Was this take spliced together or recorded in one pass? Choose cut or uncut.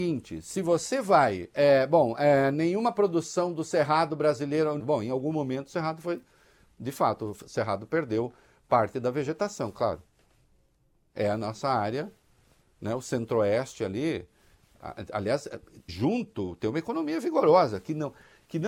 cut